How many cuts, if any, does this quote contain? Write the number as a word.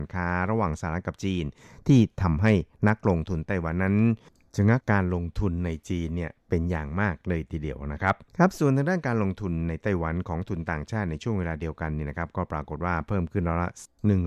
two